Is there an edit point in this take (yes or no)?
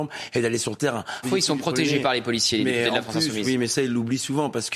yes